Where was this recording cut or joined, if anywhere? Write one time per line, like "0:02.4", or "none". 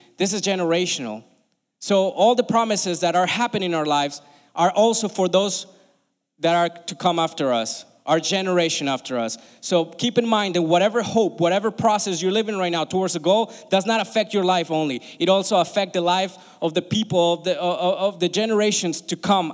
none